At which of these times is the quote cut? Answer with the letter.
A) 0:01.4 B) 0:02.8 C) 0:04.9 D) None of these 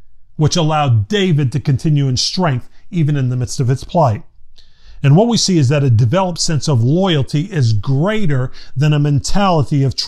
D